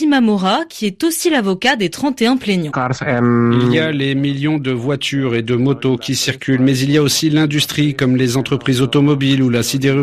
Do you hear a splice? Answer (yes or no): yes